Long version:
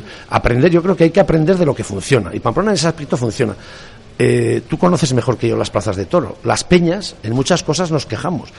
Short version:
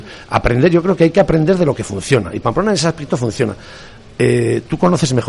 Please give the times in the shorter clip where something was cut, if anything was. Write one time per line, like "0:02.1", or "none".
none